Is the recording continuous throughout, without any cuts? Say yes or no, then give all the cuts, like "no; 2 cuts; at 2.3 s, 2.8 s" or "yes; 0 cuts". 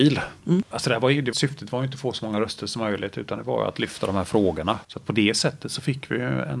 no; 2 cuts; at 1.3 s, 4.8 s